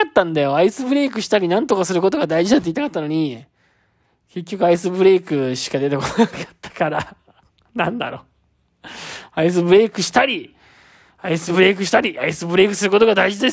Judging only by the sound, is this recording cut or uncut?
uncut